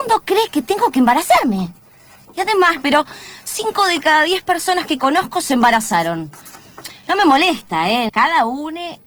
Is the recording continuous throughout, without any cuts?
no; 2 cuts; at 2.8 s, 8.1 s

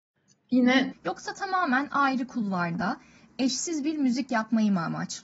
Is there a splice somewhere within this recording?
yes; 1 cut; at 0.9 s

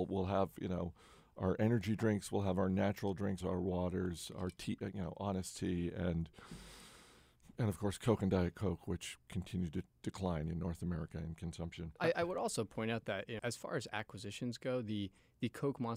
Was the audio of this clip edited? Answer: yes; 3 cuts; at 3.4 s, 12.0 s, 13.4 s

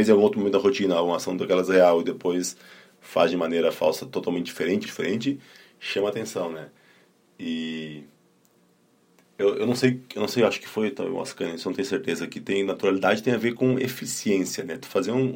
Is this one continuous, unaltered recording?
no; 1 cut; at 4.9 s

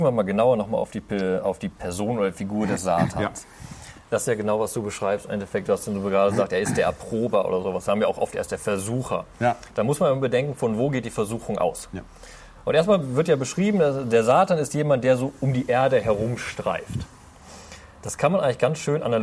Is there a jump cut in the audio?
no; 0 cuts

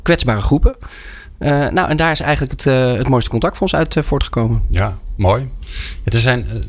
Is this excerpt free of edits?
yes; 0 cuts

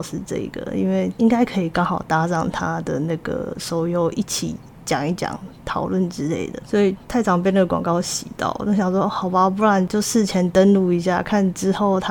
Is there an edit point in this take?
yes; 1 cut; at 9.9 s

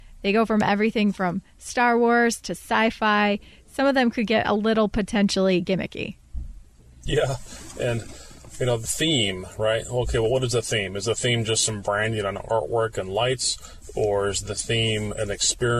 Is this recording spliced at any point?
no; 0 cuts

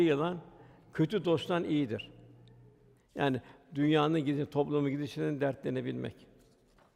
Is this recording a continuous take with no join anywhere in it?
no; 1 cut; at 3.0 s

